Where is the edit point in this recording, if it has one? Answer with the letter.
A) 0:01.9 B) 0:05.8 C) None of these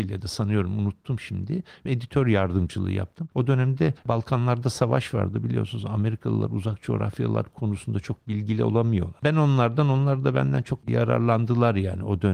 A